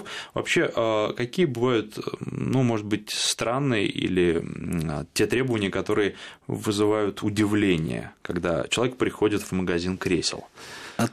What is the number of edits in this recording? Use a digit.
0